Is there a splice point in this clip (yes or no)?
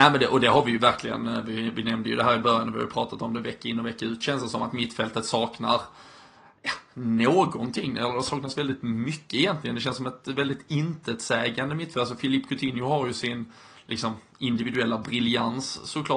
no